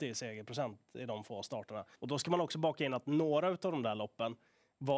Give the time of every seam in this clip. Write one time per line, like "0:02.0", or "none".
0:01.9